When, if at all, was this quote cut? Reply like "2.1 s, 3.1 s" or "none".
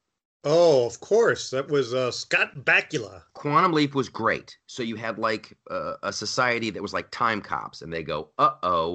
none